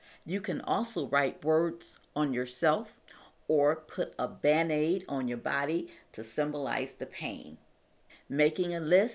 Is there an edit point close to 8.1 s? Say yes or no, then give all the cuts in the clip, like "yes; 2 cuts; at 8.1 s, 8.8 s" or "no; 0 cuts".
yes; 1 cut; at 8.1 s